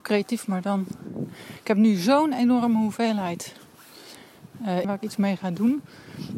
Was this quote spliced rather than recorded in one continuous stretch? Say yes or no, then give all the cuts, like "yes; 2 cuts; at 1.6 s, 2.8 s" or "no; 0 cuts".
yes; 1 cut; at 4.8 s